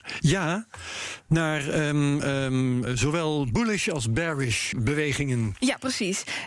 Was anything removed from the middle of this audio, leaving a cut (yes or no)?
yes